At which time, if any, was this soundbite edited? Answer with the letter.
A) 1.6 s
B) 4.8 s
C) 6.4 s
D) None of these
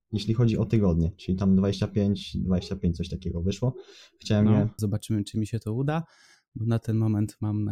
B